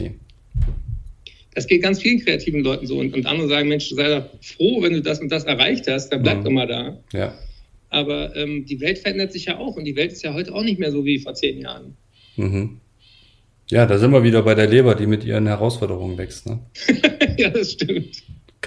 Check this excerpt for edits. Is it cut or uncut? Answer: uncut